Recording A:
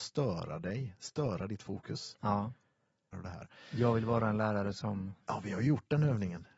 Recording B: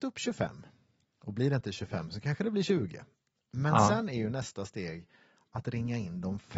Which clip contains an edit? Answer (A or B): A